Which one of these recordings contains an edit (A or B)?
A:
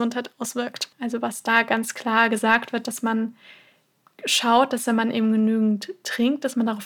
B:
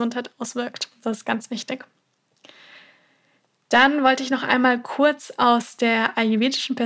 A